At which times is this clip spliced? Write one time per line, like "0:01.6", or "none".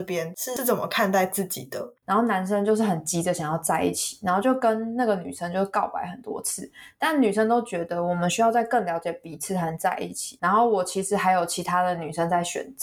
0:02.0
0:10.4